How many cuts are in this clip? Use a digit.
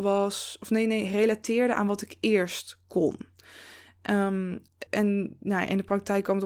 1